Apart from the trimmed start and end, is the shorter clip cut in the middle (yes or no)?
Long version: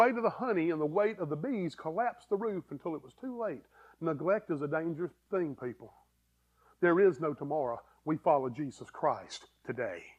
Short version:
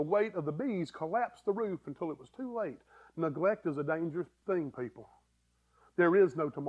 no